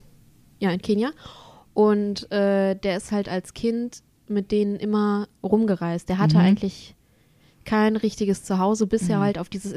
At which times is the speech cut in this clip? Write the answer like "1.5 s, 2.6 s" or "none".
none